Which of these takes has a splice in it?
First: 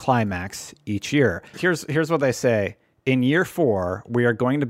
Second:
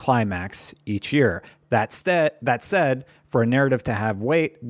first; 1 cut; at 1.5 s

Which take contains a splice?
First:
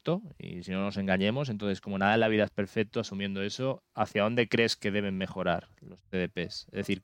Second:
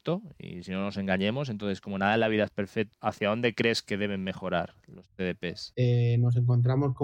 second; 2 cuts; at 2.9 s, 5.7 s

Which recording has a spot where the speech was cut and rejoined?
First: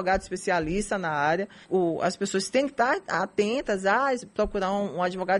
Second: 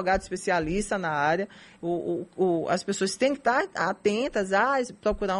first; 1 cut; at 1.6 s

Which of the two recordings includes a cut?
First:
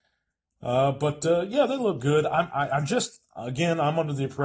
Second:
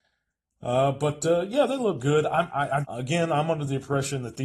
second; 1 cut; at 2.8 s

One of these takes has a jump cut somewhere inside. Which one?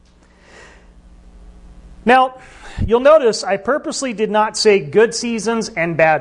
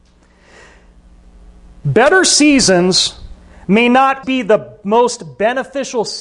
second; 2 cuts; at 1.8 s, 4.2 s

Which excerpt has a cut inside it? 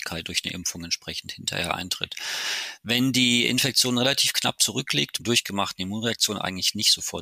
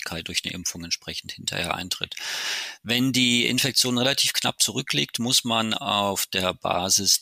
first; 1 cut; at 5.2 s

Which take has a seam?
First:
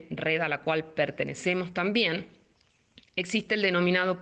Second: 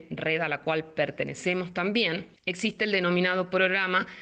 second; 1 cut; at 2.4 s

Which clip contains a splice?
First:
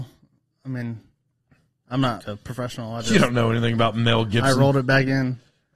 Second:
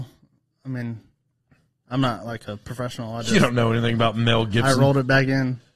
first; 1 cut; at 2.2 s

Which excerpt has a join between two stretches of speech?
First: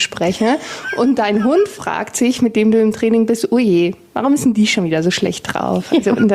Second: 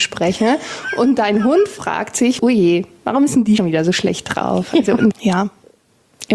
second; 3 cuts; at 2.4 s, 3.6 s, 5.1 s

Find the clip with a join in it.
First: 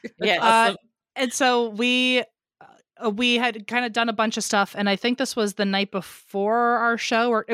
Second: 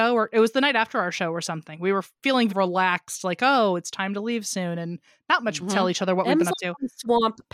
second; 2 cuts; at 2.5 s, 5.6 s

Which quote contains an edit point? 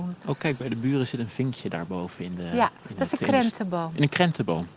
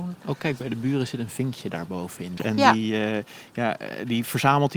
second; 1 cut; at 2.4 s

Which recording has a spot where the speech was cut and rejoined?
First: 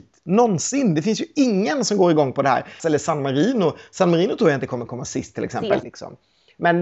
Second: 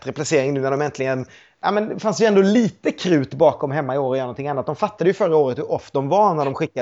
first; 2 cuts; at 2.8 s, 5.8 s

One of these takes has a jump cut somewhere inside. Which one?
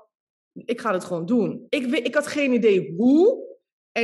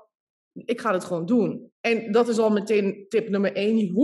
second; 1 cut; at 1.7 s

